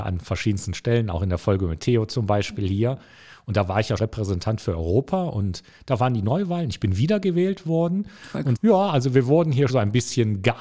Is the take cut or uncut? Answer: cut